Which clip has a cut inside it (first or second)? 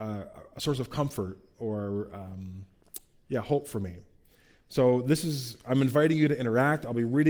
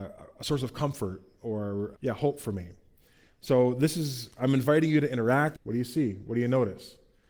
second